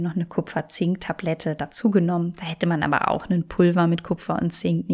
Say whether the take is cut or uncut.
uncut